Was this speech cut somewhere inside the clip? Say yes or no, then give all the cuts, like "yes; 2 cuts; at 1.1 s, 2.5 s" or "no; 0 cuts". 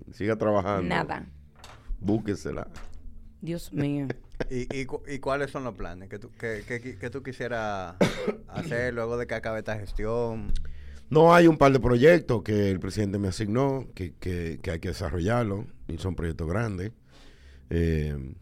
no; 0 cuts